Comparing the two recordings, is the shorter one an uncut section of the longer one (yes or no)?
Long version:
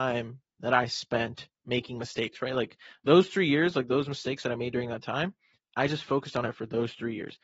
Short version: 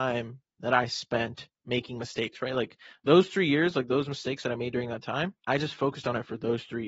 no